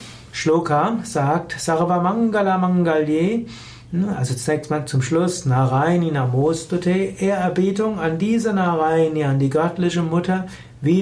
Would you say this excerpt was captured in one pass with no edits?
yes; 0 cuts

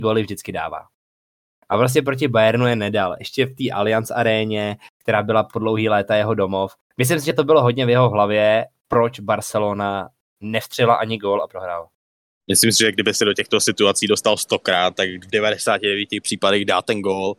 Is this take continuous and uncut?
yes; 0 cuts

